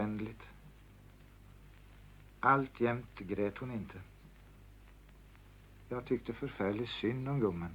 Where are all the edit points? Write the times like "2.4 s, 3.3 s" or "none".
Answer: none